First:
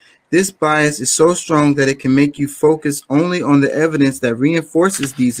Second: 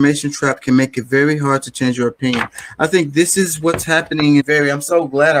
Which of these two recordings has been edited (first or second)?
second